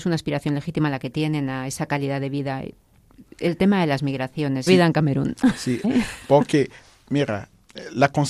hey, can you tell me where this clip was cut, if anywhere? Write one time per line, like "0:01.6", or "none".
0:04.7
0:05.8